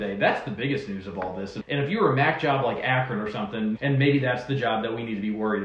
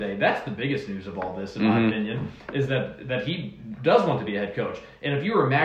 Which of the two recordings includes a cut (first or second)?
first